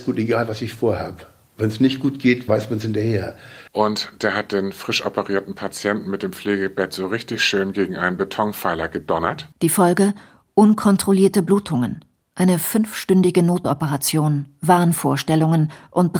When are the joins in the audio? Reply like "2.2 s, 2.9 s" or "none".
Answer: 3.7 s, 9.5 s